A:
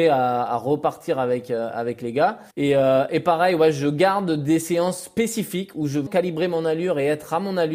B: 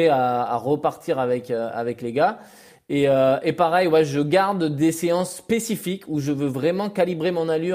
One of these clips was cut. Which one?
A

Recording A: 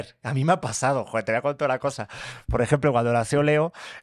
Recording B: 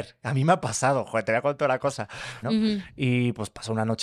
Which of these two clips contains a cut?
B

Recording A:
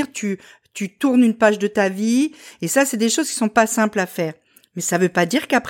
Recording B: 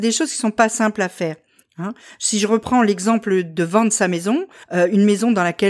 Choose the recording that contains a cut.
B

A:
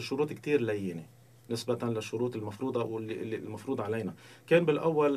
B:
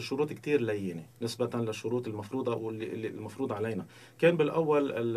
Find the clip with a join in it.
B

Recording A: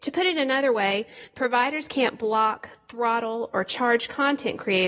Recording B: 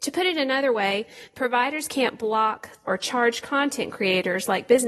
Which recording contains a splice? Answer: B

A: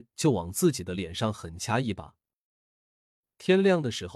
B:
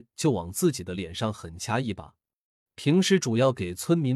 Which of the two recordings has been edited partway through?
B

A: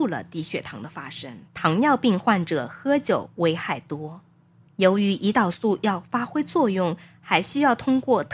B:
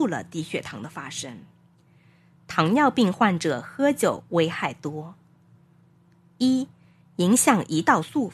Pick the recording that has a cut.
A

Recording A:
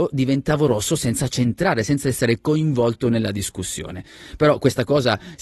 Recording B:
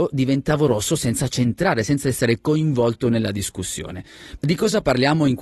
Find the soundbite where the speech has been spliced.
B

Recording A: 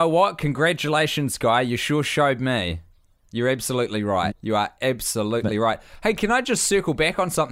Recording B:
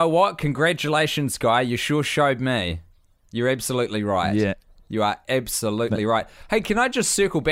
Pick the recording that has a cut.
A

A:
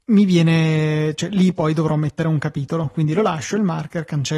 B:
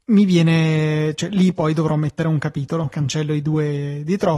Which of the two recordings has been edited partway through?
B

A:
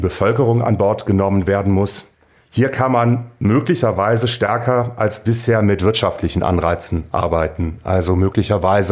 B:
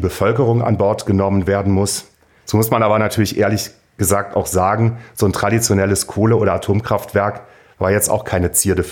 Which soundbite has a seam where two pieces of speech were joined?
B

